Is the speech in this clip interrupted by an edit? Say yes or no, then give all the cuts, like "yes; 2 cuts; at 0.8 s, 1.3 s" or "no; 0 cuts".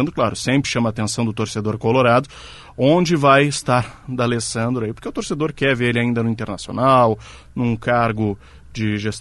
no; 0 cuts